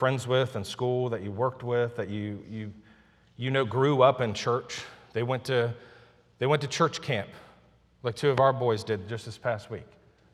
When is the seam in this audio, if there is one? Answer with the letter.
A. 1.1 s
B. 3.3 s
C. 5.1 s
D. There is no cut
D